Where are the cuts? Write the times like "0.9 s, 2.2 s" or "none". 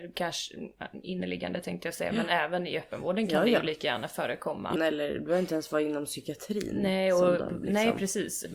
4.8 s